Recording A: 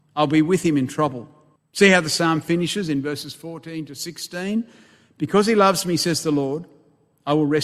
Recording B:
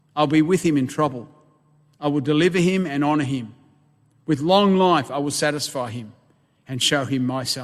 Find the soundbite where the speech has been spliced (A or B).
A